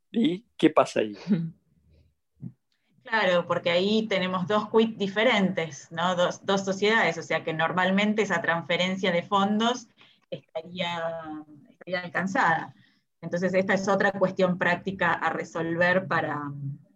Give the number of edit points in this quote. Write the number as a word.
zero